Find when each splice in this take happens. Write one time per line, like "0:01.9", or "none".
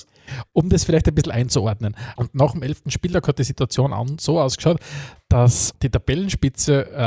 0:02.2
0:05.7